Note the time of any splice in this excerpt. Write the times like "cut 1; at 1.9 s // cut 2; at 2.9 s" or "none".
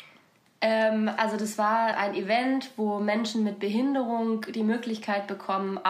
cut 1; at 1.9 s